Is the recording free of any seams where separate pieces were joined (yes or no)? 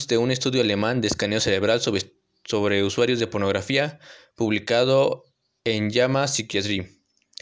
yes